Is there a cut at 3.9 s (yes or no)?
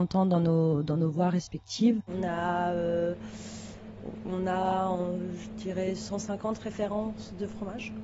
no